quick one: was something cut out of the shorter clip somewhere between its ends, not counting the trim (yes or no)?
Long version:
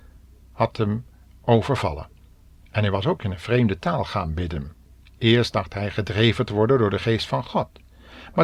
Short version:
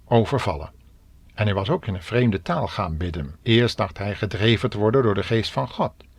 yes